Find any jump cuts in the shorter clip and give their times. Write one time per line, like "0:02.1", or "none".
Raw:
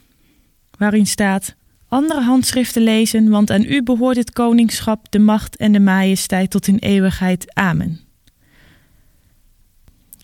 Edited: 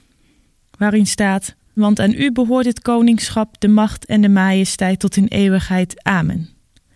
0:01.8